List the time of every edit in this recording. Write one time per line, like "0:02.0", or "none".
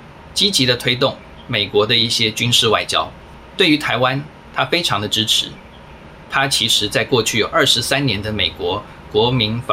0:06.3

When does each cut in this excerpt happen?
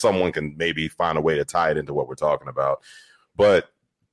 none

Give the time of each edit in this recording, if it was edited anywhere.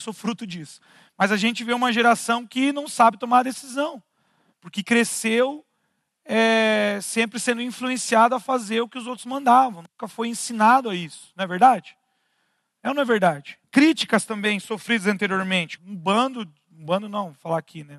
0:13.6
0:15.8

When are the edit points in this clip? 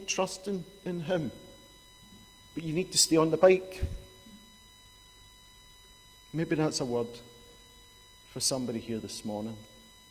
none

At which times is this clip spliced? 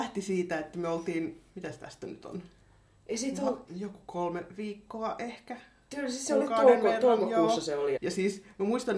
0:01.5
0:03.7
0:08.0

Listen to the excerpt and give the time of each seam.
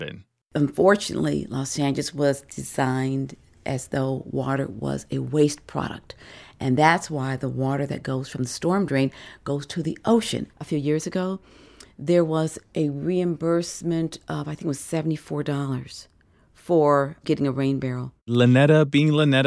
0:10.5

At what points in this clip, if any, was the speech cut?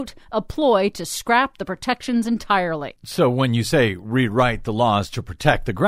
none

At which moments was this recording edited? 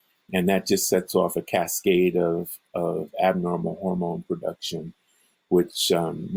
none

